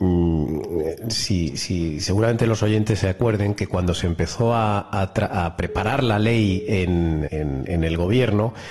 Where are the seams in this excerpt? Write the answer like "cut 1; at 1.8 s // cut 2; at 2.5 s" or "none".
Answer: cut 1; at 7.3 s